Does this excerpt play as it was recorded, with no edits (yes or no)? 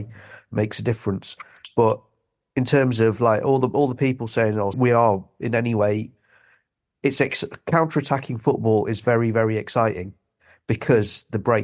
no